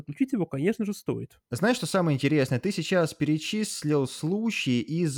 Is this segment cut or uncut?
uncut